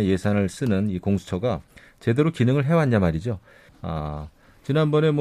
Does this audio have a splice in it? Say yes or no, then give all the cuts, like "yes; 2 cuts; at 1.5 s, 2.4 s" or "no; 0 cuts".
yes; 1 cut; at 3.7 s